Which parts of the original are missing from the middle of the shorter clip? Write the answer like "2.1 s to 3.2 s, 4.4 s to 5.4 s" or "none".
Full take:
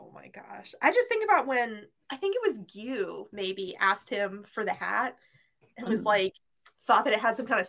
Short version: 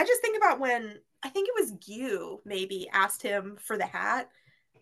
none